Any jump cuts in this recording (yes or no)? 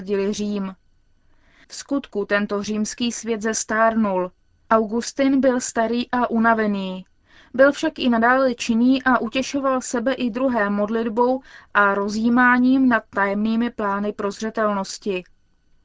yes